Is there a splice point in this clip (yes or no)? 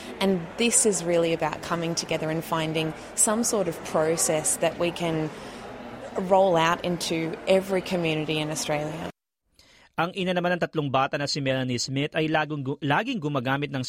no